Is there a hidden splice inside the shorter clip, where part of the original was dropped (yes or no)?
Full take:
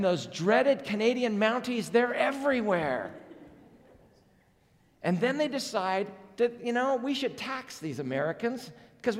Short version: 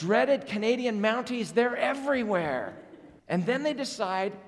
yes